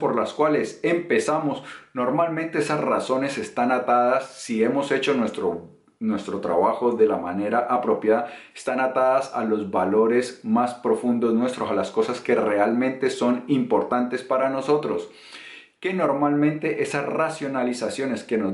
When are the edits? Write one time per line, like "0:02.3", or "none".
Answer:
0:15.8